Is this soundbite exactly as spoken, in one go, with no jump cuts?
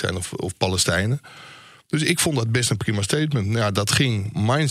yes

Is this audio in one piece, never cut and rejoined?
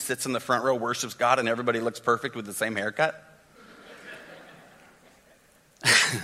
yes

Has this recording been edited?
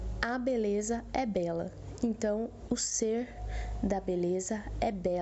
yes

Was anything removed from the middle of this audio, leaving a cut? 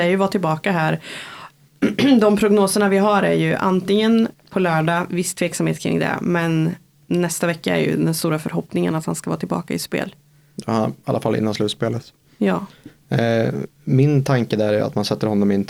yes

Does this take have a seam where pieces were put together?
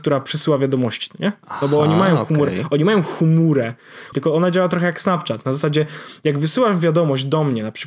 yes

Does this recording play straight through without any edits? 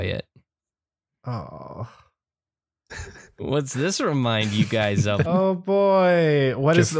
no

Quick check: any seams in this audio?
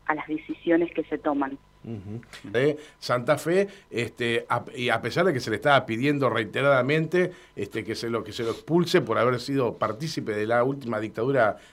yes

